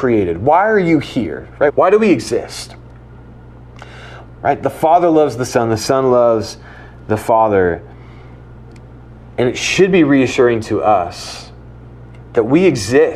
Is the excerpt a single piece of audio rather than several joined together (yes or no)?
no